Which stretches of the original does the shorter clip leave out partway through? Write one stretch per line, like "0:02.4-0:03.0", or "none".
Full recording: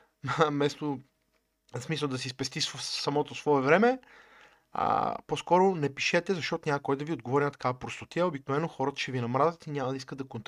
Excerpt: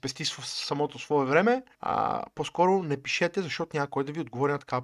0:04.1-0:04.6